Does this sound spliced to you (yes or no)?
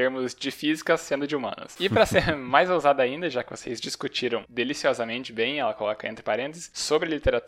no